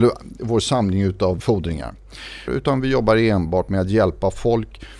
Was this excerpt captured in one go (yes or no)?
no